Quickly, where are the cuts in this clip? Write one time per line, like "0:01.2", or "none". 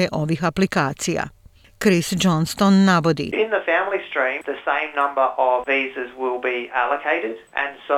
0:04.4
0:05.7